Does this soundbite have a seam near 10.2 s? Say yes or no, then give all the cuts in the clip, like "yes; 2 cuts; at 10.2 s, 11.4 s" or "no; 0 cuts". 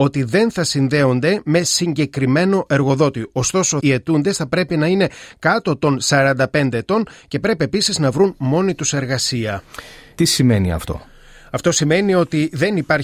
yes; 2 cuts; at 3.8 s, 10.2 s